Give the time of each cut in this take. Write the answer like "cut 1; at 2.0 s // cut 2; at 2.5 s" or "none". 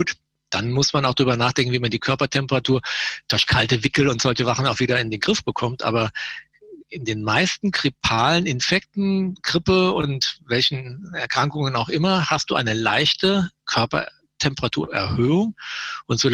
none